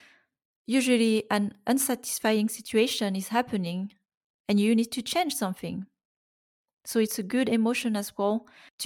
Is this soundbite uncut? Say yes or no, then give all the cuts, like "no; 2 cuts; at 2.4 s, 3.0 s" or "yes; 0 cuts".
yes; 0 cuts